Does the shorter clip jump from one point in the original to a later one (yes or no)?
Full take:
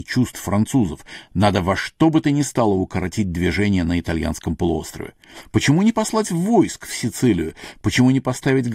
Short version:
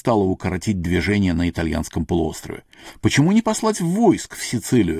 no